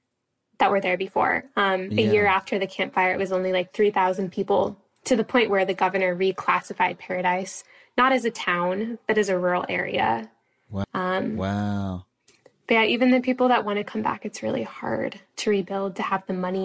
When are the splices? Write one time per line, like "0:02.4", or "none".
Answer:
0:10.8